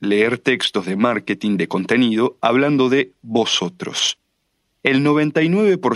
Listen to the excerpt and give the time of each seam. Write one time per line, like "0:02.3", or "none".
none